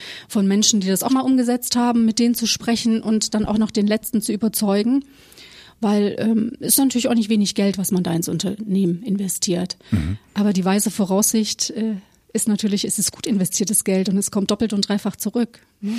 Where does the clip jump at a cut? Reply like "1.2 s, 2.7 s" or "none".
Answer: 1.1 s